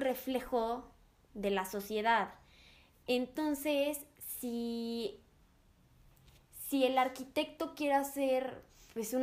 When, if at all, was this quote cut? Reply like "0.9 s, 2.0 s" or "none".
none